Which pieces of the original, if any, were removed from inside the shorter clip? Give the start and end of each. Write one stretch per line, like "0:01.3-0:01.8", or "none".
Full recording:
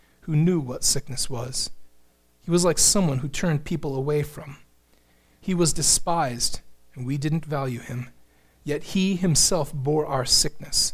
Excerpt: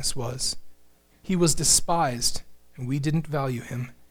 0:02.2-0:05.3